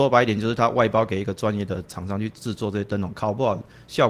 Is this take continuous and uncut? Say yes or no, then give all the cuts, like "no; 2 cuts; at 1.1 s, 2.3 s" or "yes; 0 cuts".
yes; 0 cuts